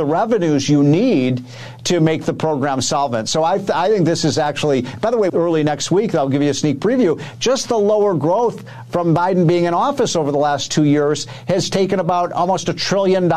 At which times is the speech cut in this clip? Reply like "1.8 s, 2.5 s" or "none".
5.3 s